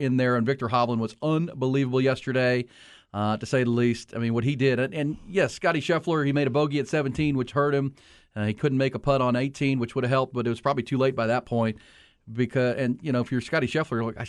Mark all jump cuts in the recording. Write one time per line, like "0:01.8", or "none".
none

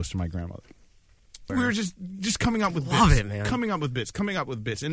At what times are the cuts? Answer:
0:01.5

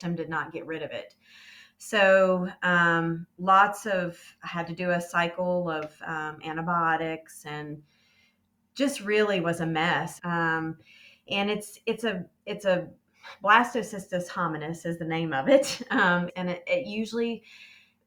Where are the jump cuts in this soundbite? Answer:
0:10.2
0:16.3

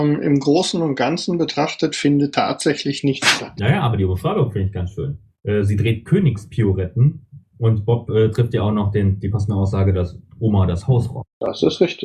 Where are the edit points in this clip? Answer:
none

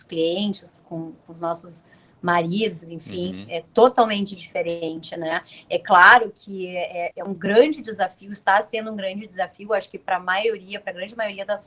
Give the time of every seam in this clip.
0:02.8
0:07.1

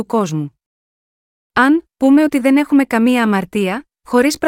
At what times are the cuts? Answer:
0:01.9

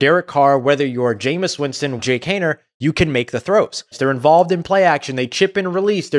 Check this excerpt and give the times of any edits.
0:02.0
0:03.9

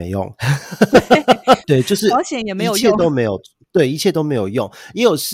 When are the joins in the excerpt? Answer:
0:01.6

